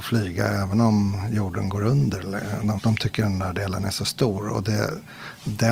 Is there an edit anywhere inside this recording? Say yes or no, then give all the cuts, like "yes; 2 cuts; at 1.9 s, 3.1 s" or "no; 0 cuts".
yes; 1 cut; at 2.8 s